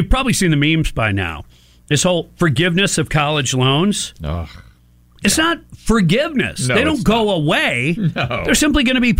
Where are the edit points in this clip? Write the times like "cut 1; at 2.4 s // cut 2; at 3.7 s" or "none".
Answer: none